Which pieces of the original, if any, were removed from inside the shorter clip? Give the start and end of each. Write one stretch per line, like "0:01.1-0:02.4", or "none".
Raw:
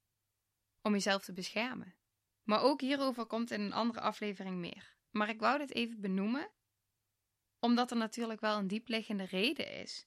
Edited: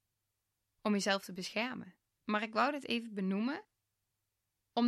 0:02.1-0:05.0